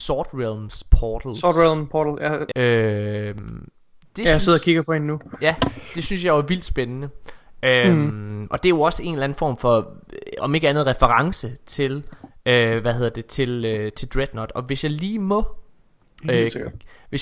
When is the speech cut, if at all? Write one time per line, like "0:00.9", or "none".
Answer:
0:02.5